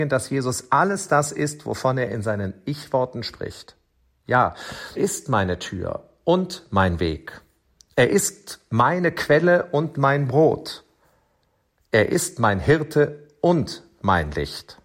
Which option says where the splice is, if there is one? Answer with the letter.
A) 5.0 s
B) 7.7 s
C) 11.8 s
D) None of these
A